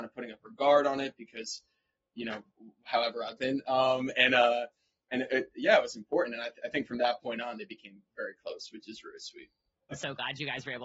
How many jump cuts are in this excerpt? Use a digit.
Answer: 1